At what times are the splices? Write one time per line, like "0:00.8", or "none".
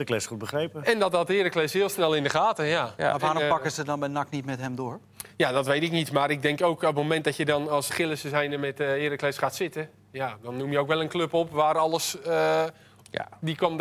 0:07.9